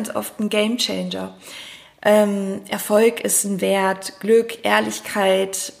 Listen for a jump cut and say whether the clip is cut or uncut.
uncut